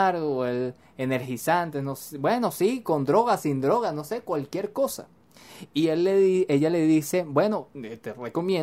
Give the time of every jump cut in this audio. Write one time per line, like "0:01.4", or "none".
none